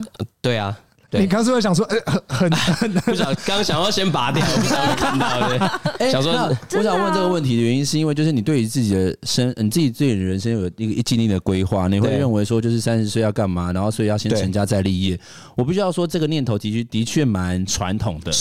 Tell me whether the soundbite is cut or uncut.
uncut